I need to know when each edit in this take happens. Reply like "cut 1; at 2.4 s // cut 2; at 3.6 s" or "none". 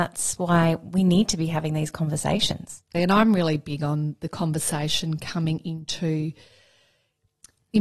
cut 1; at 2.9 s

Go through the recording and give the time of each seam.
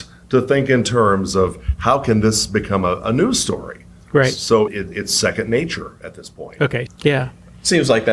cut 1; at 4.7 s // cut 2; at 6.9 s

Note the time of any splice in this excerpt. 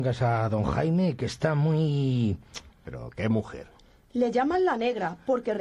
cut 1; at 2.7 s

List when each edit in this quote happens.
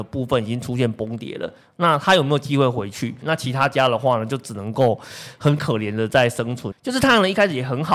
cut 1; at 3.2 s // cut 2; at 6.7 s

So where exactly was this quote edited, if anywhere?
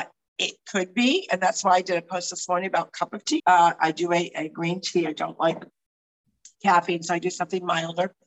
cut 1; at 3.4 s

